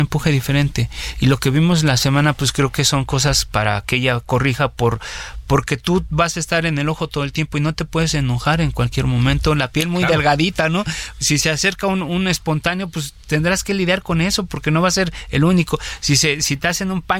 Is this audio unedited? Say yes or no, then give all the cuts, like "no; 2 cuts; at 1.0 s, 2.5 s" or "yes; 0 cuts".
yes; 0 cuts